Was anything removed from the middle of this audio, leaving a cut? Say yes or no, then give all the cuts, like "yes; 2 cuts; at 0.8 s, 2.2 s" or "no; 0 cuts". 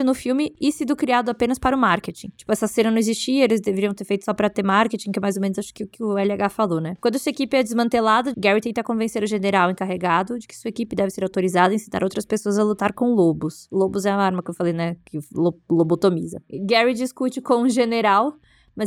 yes; 1 cut; at 8.3 s